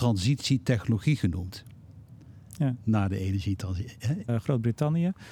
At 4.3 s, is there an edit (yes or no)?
yes